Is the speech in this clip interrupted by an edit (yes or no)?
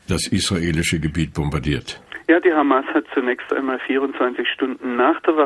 no